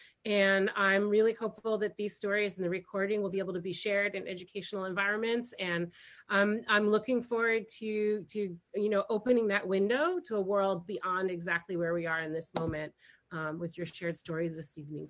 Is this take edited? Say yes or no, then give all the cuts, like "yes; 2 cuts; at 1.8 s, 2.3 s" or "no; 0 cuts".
no; 0 cuts